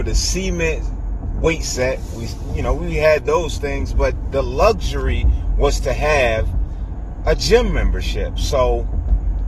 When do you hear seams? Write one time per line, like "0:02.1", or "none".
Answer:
none